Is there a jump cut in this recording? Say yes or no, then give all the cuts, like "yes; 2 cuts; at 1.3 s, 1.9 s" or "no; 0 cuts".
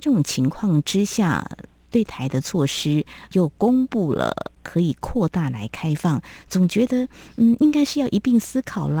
no; 0 cuts